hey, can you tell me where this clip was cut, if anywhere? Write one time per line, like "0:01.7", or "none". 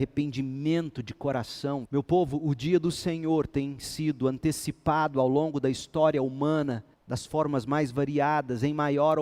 0:01.9
0:06.9